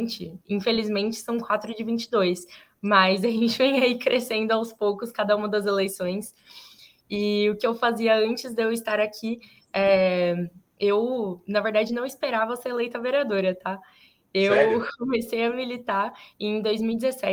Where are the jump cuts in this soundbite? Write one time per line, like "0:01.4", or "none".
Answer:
none